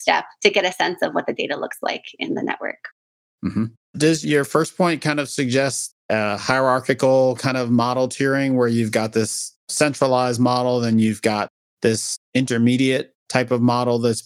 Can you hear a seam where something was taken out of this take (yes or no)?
no